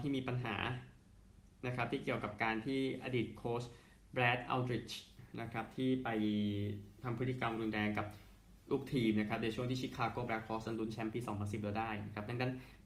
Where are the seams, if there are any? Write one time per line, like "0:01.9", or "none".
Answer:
0:08.6